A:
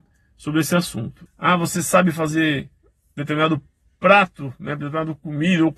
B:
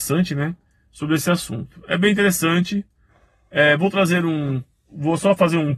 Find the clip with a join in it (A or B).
A